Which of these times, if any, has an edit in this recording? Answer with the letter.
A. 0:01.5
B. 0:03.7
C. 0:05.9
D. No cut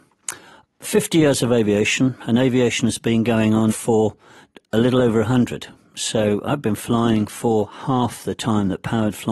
B